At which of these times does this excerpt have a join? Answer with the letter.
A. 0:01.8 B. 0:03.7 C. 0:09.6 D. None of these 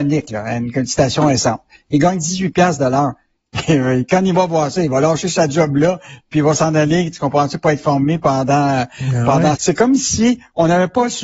C